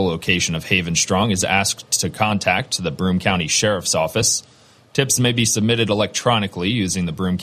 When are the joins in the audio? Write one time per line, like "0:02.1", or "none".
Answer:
none